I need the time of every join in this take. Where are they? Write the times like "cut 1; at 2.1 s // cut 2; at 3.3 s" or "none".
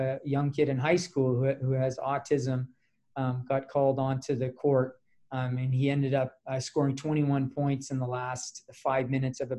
none